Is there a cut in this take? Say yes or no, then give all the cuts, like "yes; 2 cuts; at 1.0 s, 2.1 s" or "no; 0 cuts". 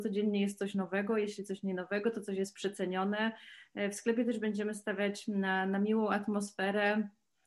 no; 0 cuts